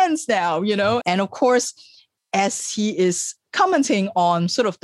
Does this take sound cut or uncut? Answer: cut